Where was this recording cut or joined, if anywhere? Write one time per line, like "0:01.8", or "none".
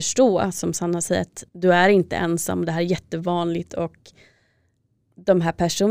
0:01.5